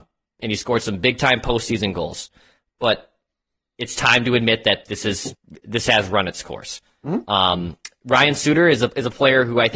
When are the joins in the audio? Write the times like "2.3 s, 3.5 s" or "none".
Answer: none